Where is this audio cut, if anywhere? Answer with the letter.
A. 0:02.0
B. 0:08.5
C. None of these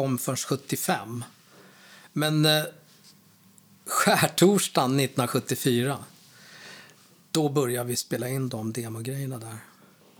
B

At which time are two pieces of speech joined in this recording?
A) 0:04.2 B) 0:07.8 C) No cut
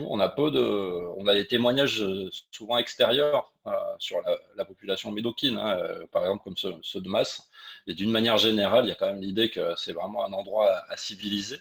C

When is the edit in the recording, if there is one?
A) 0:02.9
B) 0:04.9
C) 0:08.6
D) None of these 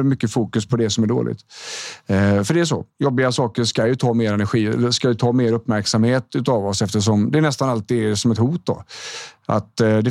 D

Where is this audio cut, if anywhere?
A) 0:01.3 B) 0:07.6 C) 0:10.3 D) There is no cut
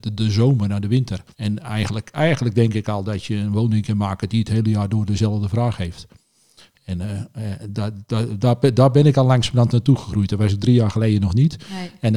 A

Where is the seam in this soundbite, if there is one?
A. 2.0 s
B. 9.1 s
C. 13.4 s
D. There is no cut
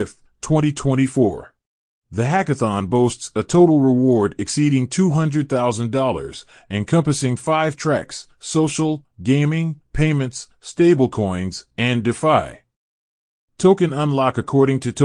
A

